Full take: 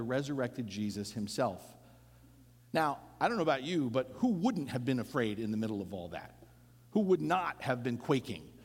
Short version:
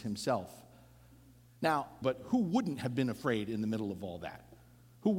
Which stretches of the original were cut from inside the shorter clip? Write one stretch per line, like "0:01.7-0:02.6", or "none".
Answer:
0:03.1-0:03.9